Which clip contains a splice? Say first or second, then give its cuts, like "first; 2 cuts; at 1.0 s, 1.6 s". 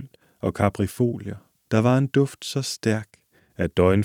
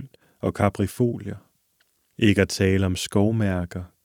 first; 1 cut; at 1.7 s